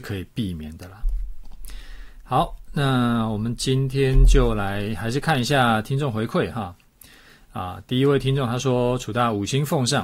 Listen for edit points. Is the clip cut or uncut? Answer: uncut